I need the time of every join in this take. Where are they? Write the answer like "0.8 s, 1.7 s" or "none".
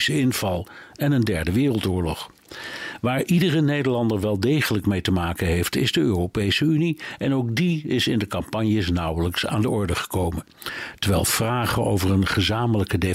none

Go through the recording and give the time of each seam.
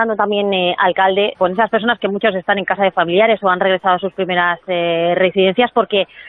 1.3 s

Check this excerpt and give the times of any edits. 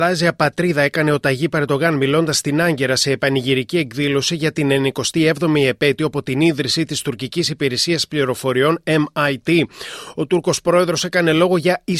none

